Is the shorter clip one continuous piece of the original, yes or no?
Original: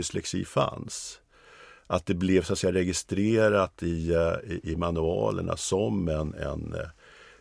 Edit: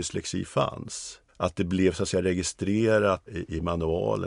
no